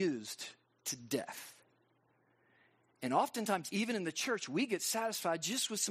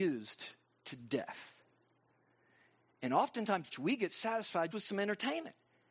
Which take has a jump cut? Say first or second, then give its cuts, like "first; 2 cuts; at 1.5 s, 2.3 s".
second; 2 cuts; at 3.7 s, 4.7 s